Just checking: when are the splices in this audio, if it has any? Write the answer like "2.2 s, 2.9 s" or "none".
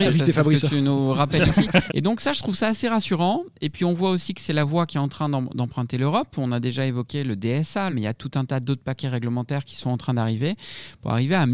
1.9 s, 7.9 s